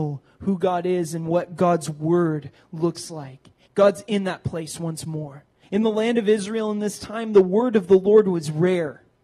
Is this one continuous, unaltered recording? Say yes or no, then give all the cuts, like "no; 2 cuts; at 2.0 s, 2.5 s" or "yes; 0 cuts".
no; 2 cuts; at 3.7 s, 5.6 s